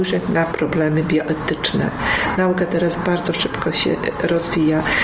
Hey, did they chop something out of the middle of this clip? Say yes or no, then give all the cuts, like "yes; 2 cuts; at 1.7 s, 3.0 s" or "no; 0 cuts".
no; 0 cuts